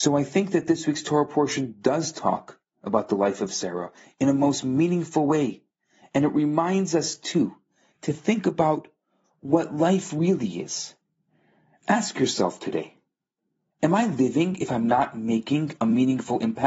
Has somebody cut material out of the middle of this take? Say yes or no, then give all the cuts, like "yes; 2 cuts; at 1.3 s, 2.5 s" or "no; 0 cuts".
no; 0 cuts